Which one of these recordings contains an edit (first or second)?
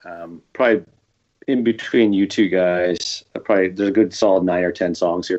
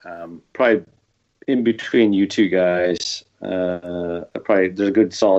first